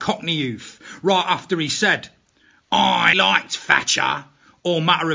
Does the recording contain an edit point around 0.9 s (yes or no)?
no